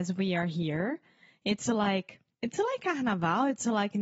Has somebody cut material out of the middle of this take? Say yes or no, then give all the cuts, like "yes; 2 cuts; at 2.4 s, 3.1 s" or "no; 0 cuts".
no; 0 cuts